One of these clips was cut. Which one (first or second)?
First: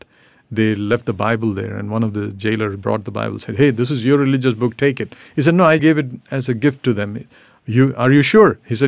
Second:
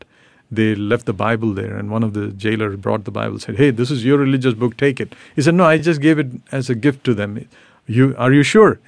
first